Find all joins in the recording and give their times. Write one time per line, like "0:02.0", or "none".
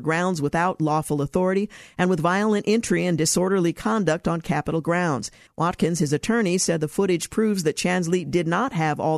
0:05.5